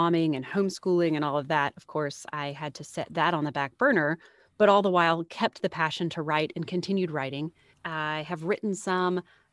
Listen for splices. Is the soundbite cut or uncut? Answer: cut